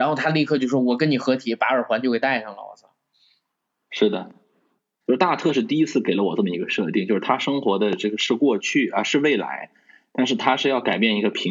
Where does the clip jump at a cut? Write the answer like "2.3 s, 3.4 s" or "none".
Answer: 5.0 s

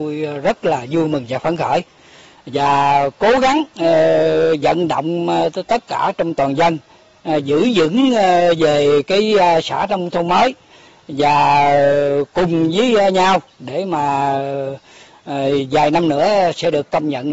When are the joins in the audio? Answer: none

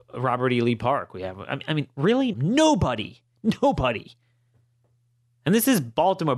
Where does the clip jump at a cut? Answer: 2.3 s

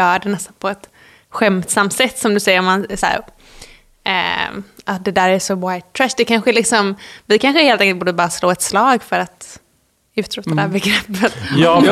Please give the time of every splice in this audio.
none

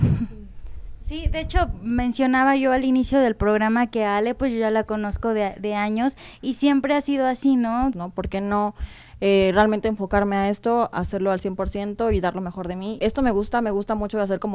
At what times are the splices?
7.9 s, 13.0 s

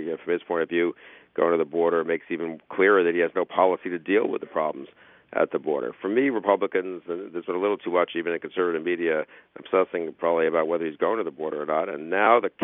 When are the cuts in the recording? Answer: none

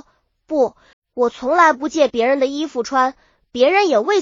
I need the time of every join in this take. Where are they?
0.9 s

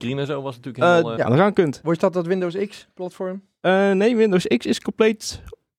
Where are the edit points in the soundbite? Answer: 1.2 s

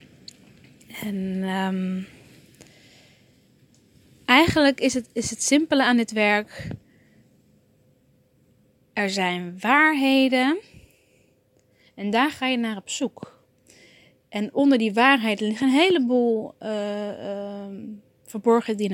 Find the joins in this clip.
none

